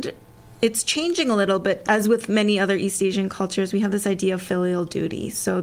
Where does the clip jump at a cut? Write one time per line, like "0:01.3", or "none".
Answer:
0:01.8

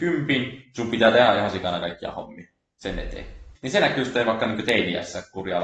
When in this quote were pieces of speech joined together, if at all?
0:03.5

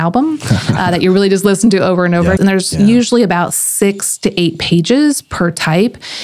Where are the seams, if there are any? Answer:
0:02.4

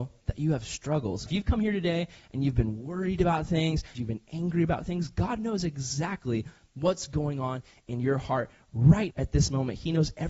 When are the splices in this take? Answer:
0:01.3
0:03.9
0:09.1

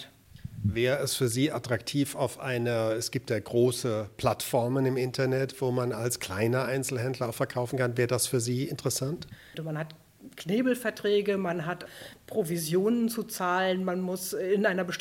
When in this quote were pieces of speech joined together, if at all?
0:09.5

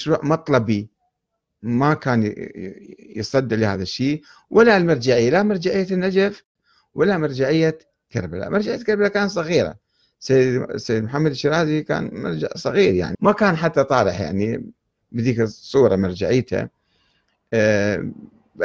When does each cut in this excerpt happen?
0:13.1

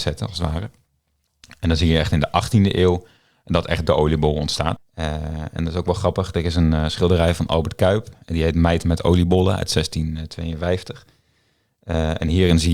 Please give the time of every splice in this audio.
0:04.8

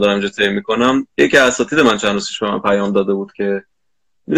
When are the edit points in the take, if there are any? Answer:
0:01.1

